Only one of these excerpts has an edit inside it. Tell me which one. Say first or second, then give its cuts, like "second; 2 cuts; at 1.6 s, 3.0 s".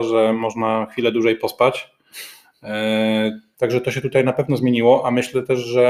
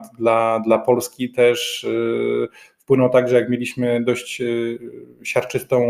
first; 1 cut; at 3.5 s